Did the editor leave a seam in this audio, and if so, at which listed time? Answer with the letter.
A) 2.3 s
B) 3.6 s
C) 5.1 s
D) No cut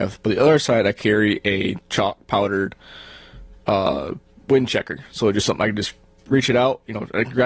D